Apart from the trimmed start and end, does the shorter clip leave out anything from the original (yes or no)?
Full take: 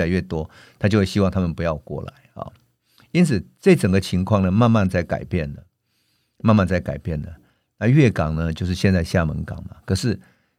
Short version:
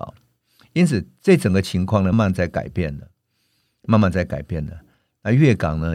yes